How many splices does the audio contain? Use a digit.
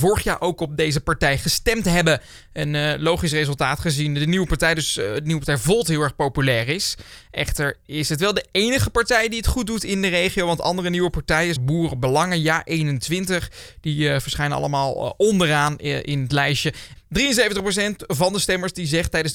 2